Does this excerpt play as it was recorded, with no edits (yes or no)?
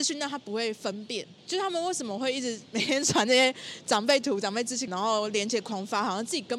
no